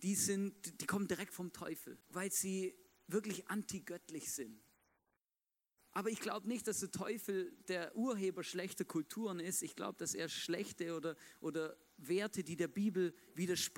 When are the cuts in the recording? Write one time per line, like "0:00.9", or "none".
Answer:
0:02.0